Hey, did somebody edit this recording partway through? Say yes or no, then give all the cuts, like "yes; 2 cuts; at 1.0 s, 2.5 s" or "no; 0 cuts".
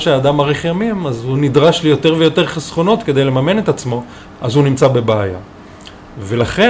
yes; 1 cut; at 4.3 s